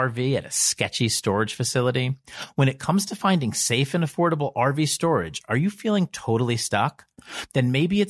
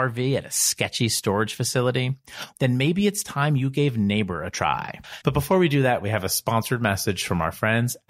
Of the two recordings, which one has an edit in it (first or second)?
second